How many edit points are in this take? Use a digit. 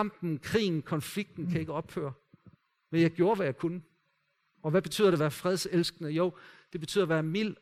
1